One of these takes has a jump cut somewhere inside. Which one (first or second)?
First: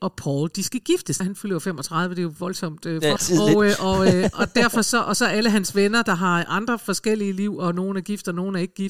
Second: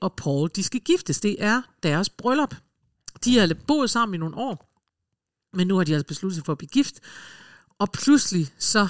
first